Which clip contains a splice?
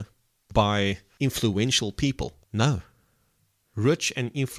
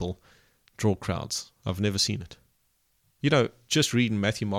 first; 1 cut; at 2.4 s

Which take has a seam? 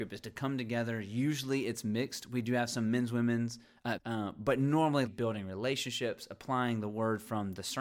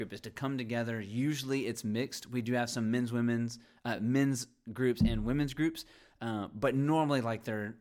first; 2 cuts; at 4.0 s, 5.1 s

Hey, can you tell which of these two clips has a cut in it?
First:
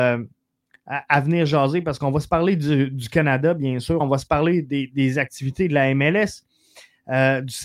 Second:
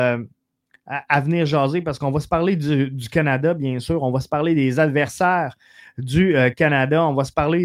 first; 1 cut; at 4.0 s

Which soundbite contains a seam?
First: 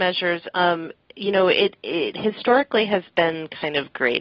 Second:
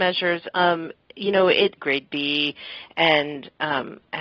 second; 1 cut; at 1.8 s

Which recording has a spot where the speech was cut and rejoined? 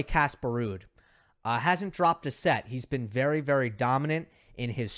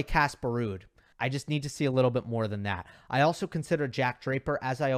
second; 1 cut; at 1.1 s

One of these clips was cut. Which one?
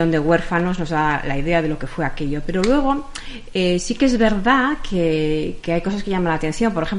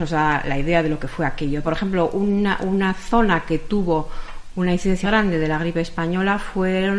second; 2 cuts; at 1.6 s, 5.0 s

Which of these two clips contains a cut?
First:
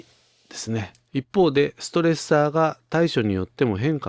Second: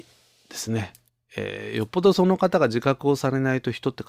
first; 1 cut; at 1.1 s

